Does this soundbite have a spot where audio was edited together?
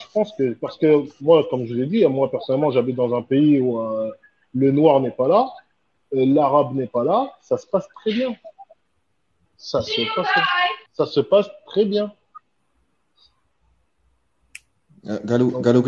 yes; 1 cut; at 10.9 s

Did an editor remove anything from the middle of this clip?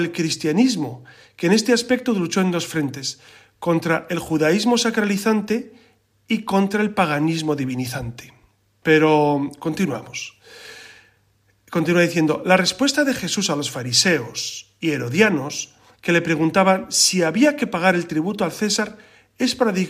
yes; 1 cut; at 8.8 s

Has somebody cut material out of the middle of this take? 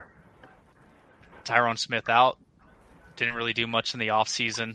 no; 0 cuts

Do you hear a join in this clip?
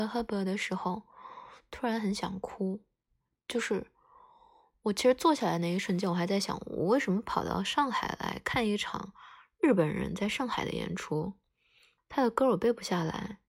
yes; 1 cut; at 12.0 s

